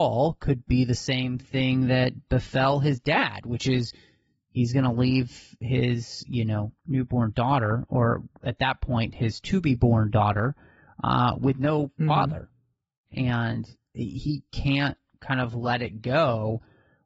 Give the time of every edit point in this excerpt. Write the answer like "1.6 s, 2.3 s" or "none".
13.1 s